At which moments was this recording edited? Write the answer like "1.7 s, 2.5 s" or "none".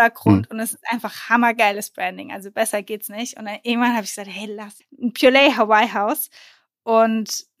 4.8 s